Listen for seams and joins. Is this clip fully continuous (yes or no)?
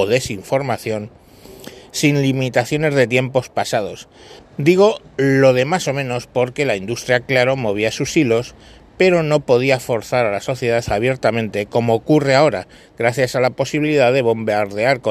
no